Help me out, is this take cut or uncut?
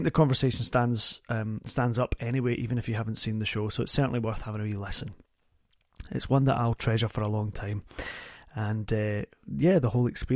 uncut